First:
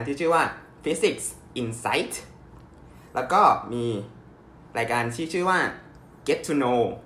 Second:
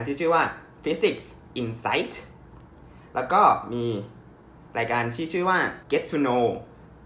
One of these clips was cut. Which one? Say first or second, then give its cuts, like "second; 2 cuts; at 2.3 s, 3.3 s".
second; 1 cut; at 5.8 s